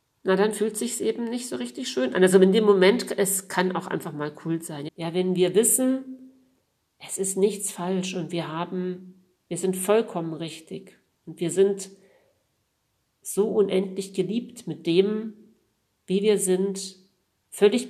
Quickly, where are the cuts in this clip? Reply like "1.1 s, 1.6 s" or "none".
4.9 s